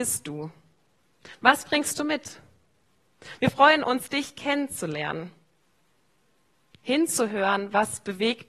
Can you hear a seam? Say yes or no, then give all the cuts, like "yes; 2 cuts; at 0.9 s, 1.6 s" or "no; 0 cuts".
no; 0 cuts